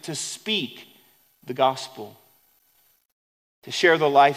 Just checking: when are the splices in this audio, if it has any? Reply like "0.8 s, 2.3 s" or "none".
none